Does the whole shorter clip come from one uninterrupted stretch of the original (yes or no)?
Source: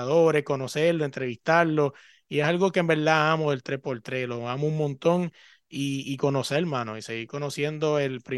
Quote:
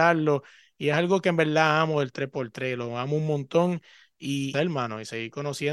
no